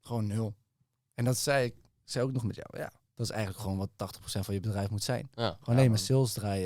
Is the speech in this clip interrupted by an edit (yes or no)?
no